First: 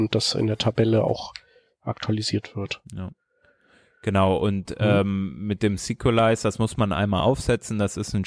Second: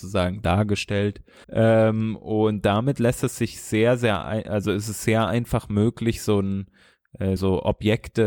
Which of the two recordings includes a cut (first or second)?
second